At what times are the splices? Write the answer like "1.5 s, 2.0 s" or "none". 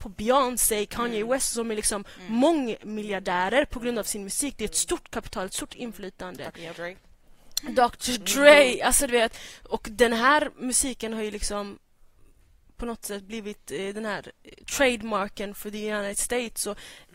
none